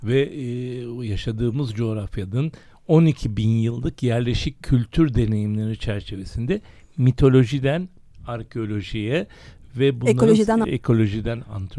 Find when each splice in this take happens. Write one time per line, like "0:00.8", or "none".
0:10.6

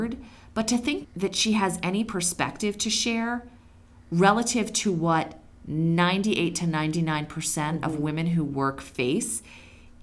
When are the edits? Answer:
0:01.0

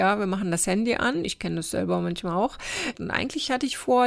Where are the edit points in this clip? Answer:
0:02.9

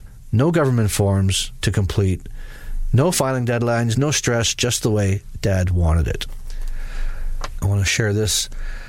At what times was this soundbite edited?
0:03.9
0:07.6

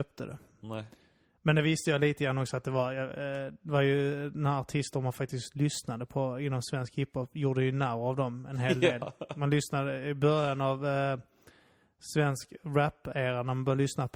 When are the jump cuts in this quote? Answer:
none

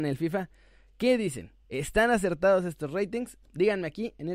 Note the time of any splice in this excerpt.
0:01.6
0:03.4

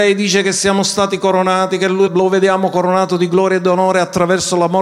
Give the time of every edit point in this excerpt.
0:02.1

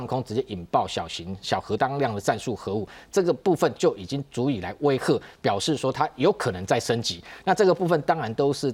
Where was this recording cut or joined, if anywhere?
none

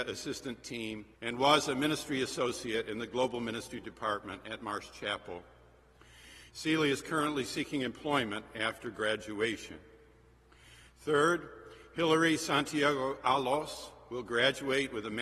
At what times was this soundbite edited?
0:01.1
0:06.5

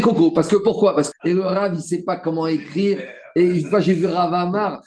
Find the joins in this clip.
0:01.1

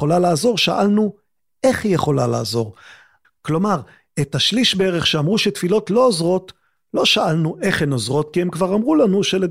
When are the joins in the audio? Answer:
0:03.2

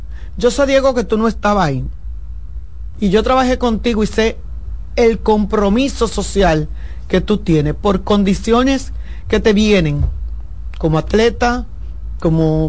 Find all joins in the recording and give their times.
0:02.9

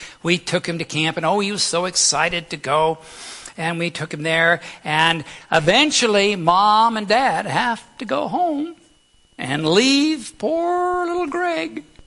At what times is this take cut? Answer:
none

